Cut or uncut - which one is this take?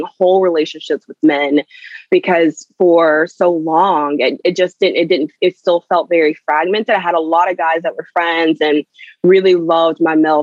uncut